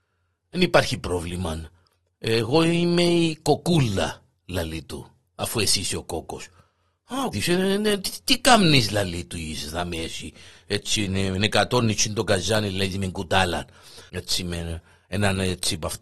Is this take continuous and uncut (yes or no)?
no